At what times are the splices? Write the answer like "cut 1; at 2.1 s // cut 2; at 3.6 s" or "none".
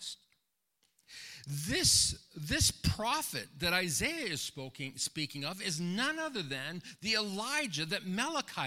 none

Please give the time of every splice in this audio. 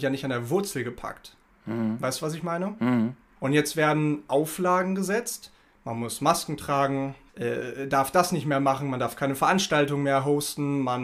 cut 1; at 3.4 s // cut 2; at 7.3 s

